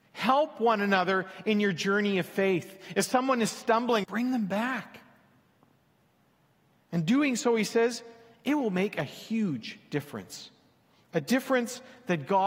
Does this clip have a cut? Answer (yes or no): yes